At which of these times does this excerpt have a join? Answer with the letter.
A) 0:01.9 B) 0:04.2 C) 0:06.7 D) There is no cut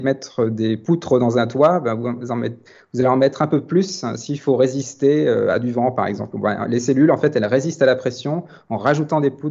D